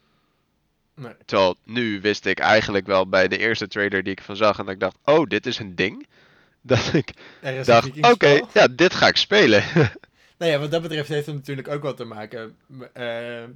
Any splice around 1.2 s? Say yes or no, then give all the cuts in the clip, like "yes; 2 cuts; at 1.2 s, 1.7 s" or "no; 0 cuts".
yes; 1 cut; at 1.2 s